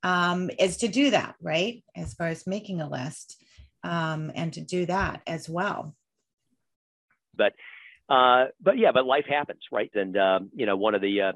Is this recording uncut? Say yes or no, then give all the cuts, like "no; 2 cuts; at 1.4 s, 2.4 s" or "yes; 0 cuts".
no; 2 cuts; at 7.4 s, 9.9 s